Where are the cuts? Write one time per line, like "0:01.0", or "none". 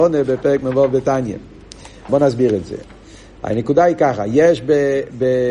0:02.1